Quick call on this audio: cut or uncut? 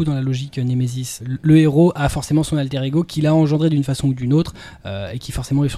cut